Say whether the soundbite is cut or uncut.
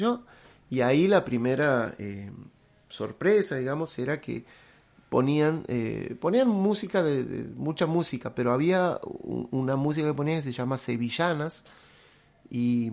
uncut